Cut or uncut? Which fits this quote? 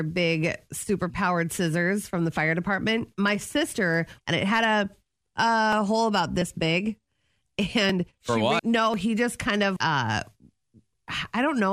cut